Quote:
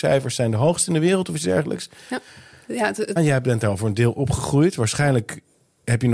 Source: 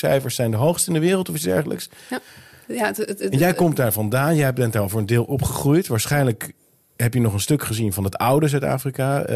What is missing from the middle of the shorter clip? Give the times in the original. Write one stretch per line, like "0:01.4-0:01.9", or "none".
0:03.2-0:04.3